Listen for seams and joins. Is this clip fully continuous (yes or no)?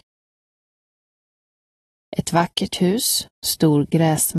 yes